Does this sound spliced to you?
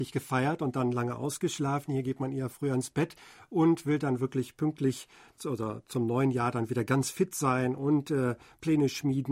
no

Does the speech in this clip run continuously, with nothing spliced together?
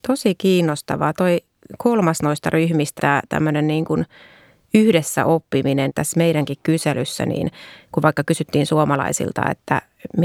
no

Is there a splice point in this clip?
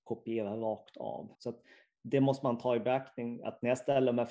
yes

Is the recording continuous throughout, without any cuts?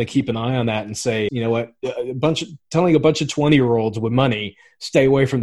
no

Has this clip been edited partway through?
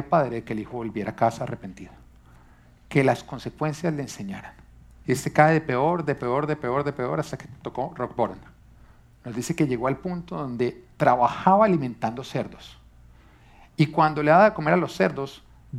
yes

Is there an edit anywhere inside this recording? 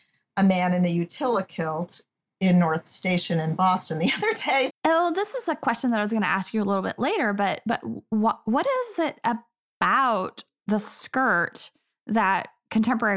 yes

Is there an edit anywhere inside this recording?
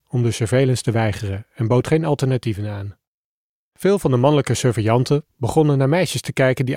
yes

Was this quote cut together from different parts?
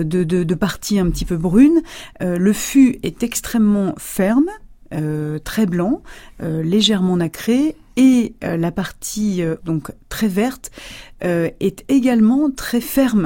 yes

